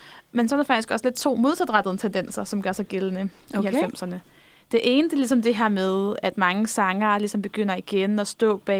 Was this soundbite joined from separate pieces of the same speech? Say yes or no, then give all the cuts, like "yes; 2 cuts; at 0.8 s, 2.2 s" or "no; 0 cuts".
no; 0 cuts